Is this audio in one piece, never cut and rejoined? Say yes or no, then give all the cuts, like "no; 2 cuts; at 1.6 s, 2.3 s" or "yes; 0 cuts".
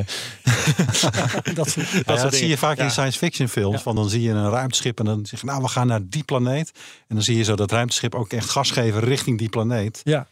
yes; 0 cuts